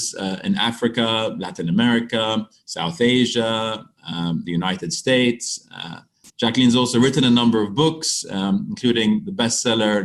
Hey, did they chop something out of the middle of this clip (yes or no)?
yes